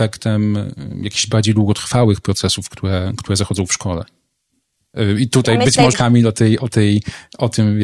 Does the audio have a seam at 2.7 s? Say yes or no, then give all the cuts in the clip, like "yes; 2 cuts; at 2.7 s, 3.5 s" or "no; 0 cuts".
no; 1 cut; at 5.9 s